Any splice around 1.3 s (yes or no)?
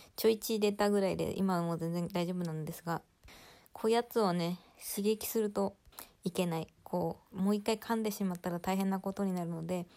no